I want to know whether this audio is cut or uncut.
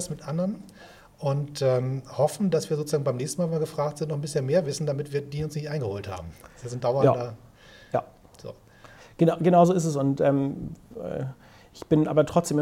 uncut